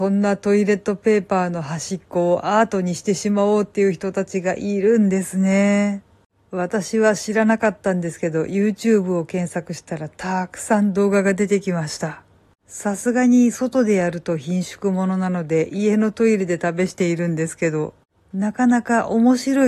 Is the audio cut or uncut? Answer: uncut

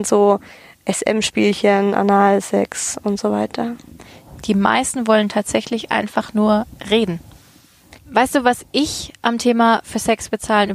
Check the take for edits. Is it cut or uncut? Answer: cut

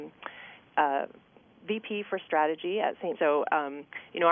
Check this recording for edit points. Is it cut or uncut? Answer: cut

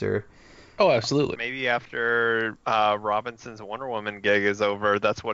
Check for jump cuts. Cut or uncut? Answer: cut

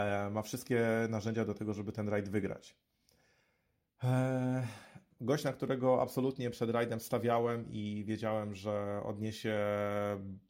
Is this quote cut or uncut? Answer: cut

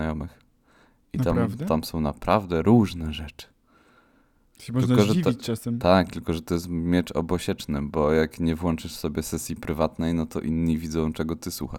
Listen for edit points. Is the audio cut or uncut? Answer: uncut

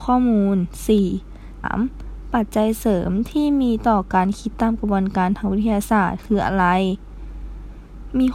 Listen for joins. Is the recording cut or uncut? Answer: cut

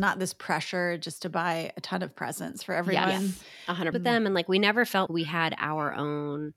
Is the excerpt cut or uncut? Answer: cut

